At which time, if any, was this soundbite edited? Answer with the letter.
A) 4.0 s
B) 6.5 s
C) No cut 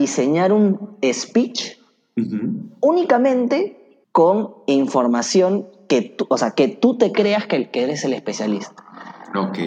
A